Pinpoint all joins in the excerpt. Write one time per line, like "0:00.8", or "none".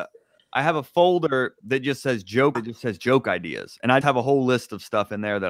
0:02.5
0:04.0